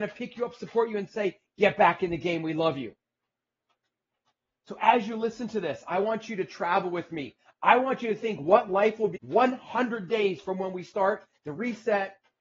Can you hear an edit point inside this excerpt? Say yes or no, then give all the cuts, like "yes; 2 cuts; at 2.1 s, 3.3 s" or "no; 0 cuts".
yes; 1 cut; at 9.2 s